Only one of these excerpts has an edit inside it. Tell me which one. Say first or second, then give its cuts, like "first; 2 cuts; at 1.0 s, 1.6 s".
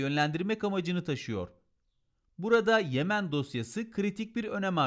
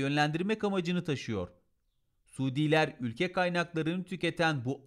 second; 1 cut; at 2.1 s